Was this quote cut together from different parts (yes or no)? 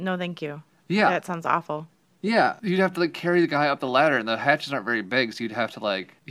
no